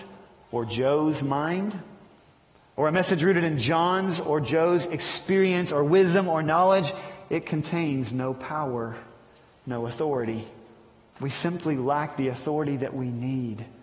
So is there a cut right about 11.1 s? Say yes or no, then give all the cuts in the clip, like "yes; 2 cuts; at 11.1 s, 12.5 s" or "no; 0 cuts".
yes; 1 cut; at 11.1 s